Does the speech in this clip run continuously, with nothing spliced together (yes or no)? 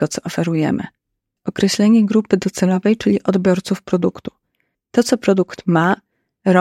no